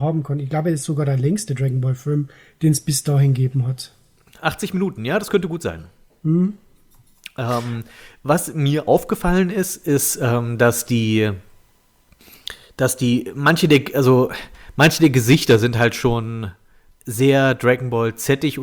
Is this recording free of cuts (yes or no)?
yes